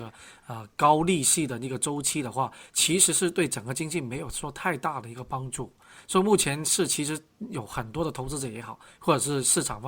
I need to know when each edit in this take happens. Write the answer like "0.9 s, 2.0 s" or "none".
none

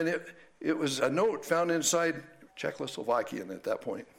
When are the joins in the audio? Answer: 1.0 s, 2.5 s

